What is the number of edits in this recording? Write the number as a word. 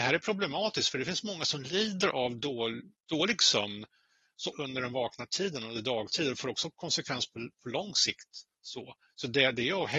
one